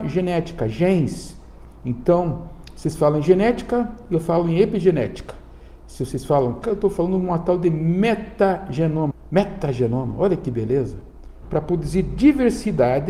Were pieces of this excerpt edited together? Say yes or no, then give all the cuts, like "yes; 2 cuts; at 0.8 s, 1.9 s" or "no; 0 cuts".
yes; 3 cuts; at 6.6 s, 9.1 s, 11.4 s